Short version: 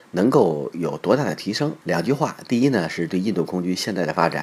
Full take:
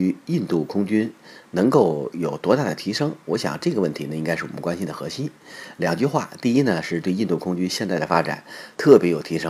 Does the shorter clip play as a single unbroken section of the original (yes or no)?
no